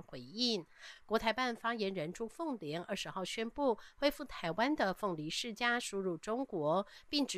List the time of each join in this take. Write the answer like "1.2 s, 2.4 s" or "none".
none